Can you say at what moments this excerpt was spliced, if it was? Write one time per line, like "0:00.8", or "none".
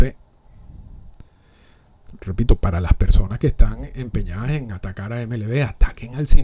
none